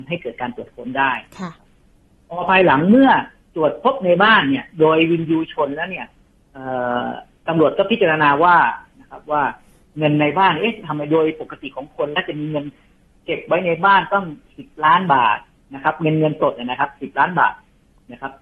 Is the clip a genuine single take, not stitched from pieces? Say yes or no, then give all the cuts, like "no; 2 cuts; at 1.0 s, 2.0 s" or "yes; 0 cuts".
yes; 0 cuts